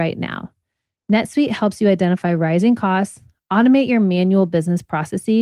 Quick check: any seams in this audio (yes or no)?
yes